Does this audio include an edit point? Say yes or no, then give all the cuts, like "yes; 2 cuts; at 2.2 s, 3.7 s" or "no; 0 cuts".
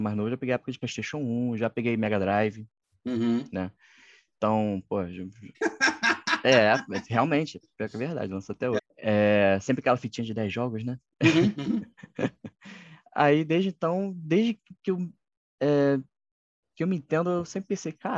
yes; 2 cuts; at 5.5 s, 8.8 s